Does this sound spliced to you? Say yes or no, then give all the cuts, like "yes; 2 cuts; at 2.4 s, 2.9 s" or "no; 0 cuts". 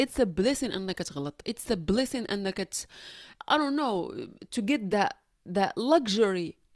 yes; 2 cuts; at 3.4 s, 4.9 s